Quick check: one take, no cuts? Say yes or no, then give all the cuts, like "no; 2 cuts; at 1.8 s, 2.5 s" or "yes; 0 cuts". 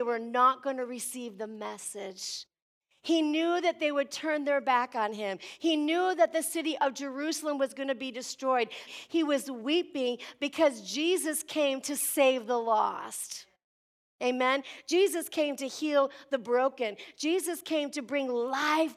no; 1 cut; at 8.9 s